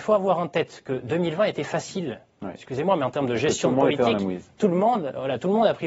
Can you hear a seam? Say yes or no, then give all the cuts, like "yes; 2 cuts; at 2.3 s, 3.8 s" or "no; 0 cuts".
no; 0 cuts